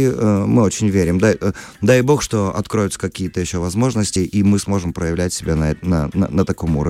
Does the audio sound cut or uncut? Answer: uncut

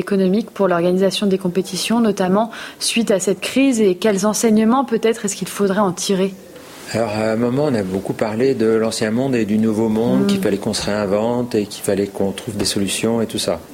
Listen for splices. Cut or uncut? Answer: uncut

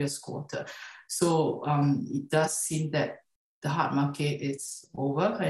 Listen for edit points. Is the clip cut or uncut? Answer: uncut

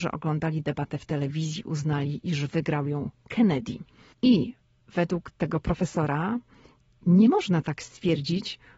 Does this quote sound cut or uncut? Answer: cut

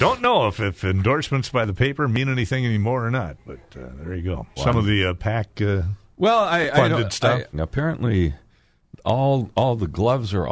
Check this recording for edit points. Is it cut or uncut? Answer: cut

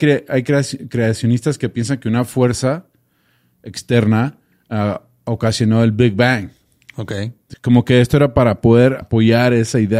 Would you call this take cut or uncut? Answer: cut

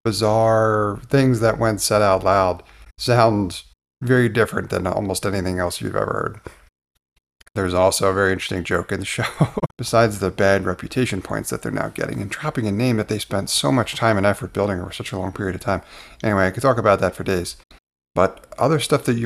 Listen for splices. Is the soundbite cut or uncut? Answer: cut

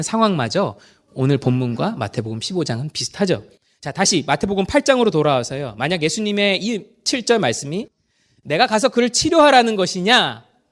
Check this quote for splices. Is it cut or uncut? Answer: uncut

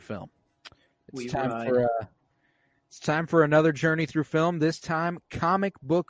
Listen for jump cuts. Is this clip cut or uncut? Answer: cut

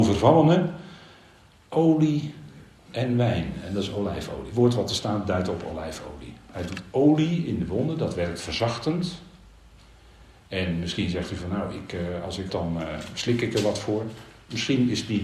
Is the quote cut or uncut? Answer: cut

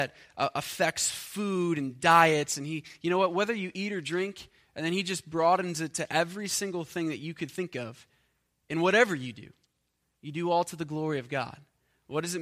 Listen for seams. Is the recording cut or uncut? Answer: uncut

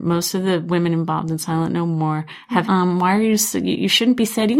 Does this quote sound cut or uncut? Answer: cut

